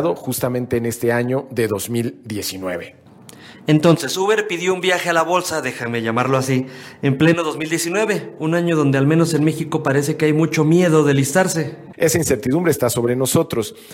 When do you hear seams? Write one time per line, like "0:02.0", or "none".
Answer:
0:11.9